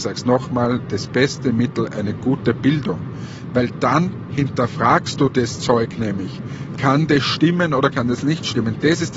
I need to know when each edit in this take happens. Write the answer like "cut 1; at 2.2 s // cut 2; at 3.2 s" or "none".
none